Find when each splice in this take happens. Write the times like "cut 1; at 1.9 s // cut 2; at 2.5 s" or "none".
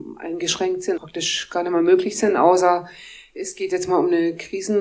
cut 1; at 0.9 s